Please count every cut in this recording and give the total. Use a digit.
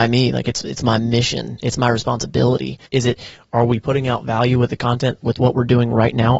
1